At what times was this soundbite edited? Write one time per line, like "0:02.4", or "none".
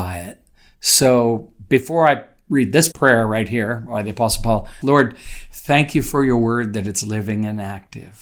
0:02.9
0:04.8